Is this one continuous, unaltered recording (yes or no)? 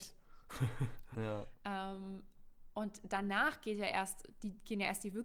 no